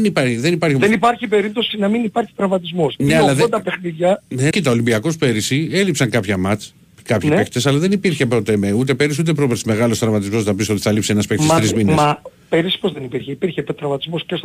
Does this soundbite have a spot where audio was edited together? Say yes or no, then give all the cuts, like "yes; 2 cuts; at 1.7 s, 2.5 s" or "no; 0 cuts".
yes; 1 cut; at 4.5 s